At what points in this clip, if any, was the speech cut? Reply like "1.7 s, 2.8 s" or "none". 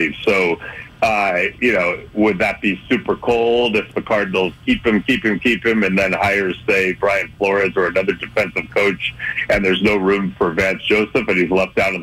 none